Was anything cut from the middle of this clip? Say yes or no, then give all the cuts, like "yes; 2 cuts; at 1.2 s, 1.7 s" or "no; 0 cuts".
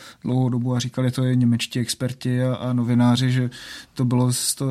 no; 0 cuts